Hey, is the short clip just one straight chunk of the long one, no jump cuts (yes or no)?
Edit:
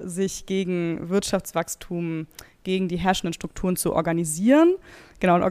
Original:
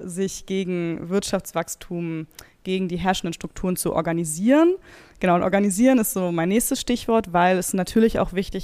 yes